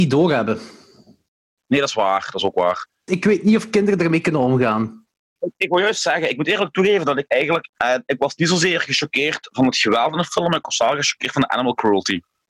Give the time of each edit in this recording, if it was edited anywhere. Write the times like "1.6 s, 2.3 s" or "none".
3.1 s, 7.7 s